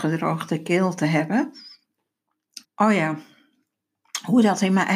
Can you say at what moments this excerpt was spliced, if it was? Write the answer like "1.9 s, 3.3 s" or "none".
2.6 s